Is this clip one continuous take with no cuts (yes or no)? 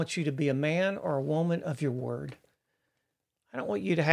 yes